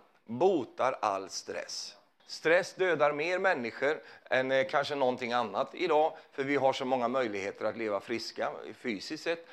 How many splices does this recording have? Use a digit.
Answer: 1